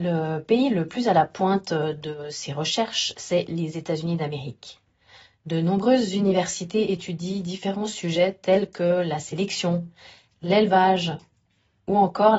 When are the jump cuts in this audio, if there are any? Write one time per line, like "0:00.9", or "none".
none